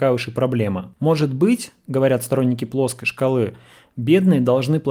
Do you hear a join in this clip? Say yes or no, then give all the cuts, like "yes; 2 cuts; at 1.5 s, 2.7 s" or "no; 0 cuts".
yes; 1 cut; at 0.9 s